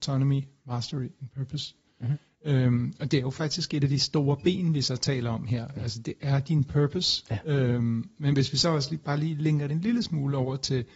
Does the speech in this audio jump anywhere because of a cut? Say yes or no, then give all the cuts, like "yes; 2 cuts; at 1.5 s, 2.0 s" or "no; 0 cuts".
no; 0 cuts